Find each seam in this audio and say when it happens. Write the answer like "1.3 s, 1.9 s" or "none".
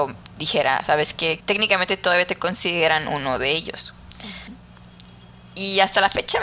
1.4 s, 4.5 s